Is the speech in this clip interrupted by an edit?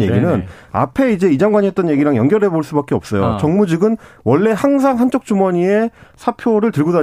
no; 0 cuts

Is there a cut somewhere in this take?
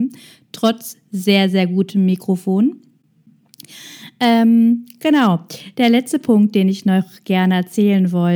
no; 0 cuts

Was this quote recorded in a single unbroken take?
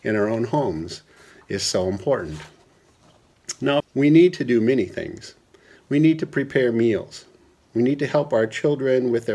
no; 1 cut; at 3.8 s

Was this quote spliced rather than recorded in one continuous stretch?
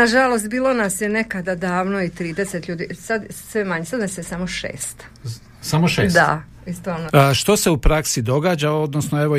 yes; 1 cut; at 7.1 s

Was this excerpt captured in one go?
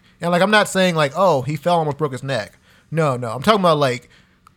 yes; 0 cuts

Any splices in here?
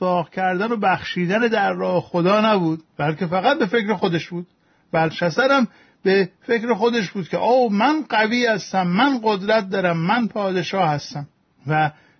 yes; 1 cut; at 2.9 s

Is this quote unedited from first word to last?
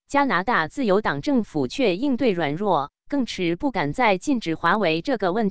no; 1 cut; at 3.3 s

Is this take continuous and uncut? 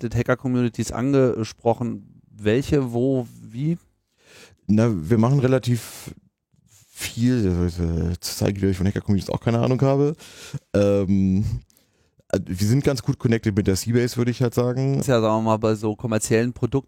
no; 1 cut; at 15.0 s

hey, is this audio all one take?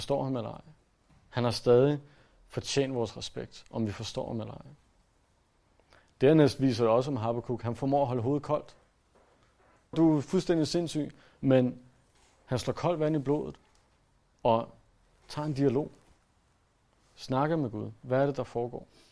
no; 1 cut; at 9.9 s

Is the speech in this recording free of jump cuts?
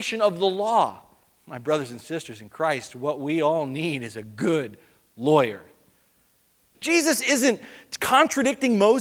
no; 2 cuts; at 1.4 s, 6.7 s

